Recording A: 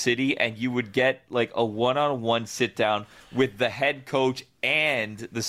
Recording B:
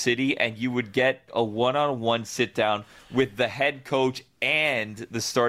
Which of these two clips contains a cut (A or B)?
B